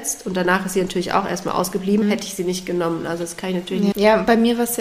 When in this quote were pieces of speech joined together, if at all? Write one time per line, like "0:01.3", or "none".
0:02.0
0:03.9